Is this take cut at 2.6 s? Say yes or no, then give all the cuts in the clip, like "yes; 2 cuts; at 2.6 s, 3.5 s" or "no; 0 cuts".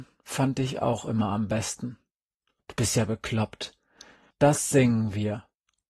yes; 2 cuts; at 2.6 s, 4.3 s